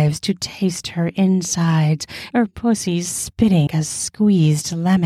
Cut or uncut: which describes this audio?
cut